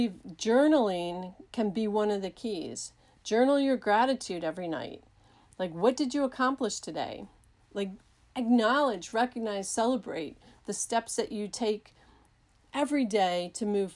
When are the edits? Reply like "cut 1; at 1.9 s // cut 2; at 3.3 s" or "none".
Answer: none

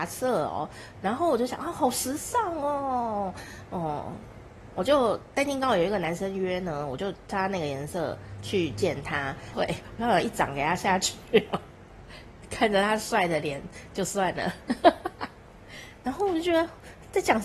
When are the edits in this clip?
cut 1; at 9.5 s

